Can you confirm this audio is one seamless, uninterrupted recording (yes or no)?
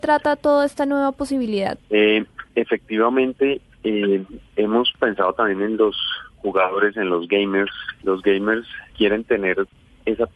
yes